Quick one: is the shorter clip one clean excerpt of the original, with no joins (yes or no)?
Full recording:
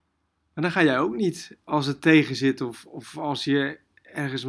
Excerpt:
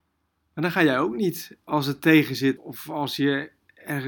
no